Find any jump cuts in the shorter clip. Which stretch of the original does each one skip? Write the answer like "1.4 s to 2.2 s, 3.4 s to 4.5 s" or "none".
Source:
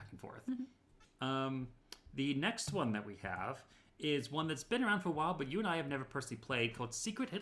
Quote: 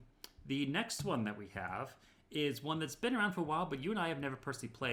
none